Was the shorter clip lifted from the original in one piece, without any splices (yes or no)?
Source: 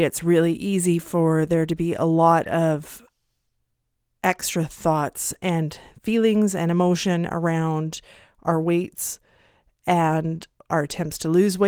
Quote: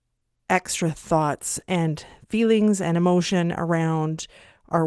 yes